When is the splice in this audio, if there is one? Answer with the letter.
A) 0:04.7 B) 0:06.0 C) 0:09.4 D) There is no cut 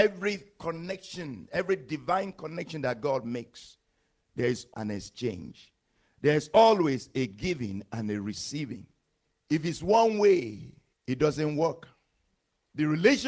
A